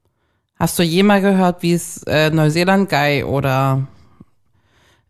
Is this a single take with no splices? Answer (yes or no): yes